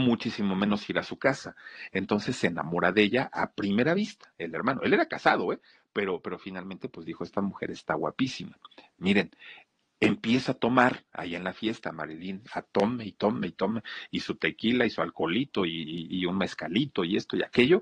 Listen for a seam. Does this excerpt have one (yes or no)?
yes